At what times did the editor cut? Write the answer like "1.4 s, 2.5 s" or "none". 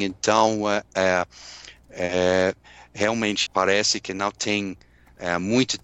3.5 s